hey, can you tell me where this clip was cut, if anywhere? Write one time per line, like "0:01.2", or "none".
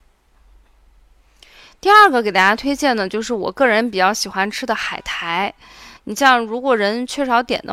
0:06.0